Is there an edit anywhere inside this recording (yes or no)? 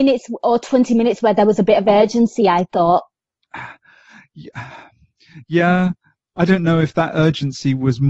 no